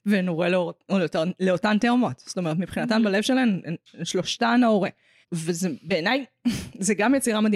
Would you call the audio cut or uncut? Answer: cut